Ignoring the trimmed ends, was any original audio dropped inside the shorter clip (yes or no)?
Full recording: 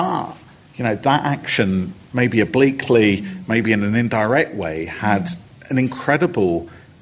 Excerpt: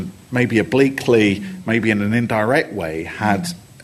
no